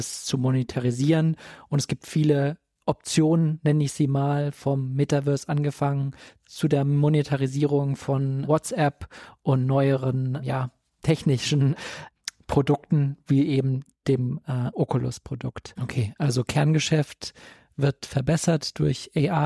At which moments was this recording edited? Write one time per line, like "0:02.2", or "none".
0:15.8